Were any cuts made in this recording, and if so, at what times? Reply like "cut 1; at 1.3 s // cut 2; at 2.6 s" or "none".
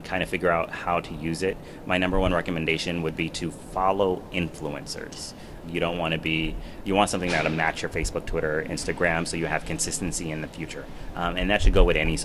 cut 1; at 5.6 s